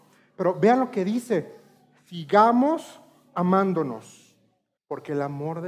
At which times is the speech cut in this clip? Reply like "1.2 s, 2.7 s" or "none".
4.8 s